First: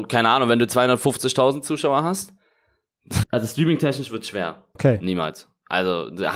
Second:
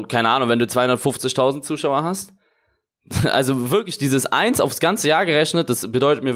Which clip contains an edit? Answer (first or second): first